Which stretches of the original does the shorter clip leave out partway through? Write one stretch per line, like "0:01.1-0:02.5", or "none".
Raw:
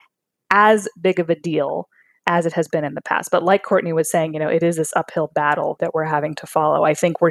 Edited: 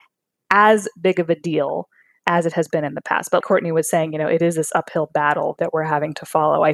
0:03.4-0:03.6